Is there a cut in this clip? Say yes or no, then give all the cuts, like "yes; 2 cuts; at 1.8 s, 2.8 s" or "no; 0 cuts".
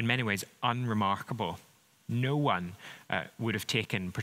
no; 0 cuts